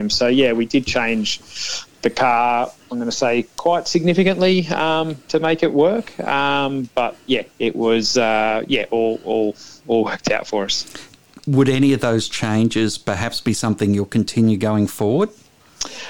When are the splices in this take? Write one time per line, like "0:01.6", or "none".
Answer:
0:07.5